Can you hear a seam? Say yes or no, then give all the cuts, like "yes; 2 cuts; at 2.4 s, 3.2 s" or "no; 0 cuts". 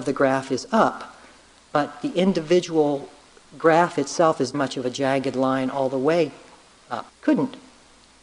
yes; 2 cuts; at 4.5 s, 7.1 s